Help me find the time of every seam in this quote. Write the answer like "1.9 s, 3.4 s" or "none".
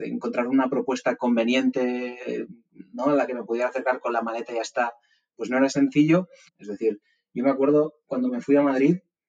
6.5 s